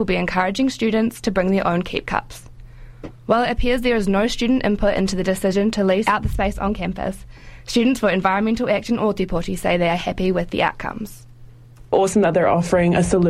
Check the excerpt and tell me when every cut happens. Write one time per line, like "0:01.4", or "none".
0:03.1